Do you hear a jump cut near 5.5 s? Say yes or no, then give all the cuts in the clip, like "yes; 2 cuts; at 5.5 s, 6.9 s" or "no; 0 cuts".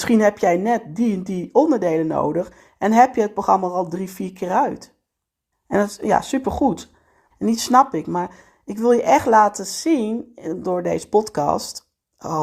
yes; 2 cuts; at 5.5 s, 7.3 s